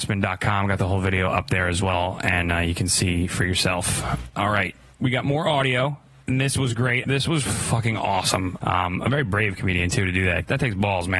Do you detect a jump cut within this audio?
yes; 2 cuts; at 7.0 s, 8.6 s

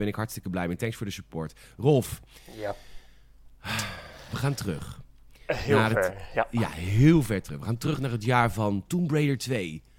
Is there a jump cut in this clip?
no; 0 cuts

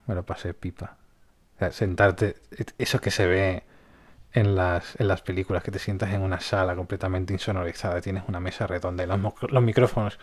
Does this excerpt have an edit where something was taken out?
no; 0 cuts

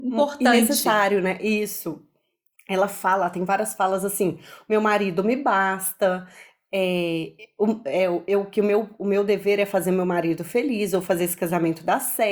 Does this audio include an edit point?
yes; 1 cut; at 2.5 s

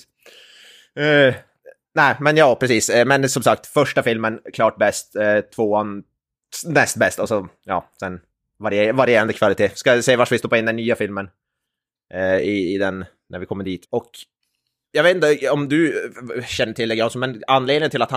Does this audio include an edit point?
yes; 1 cut; at 13.8 s

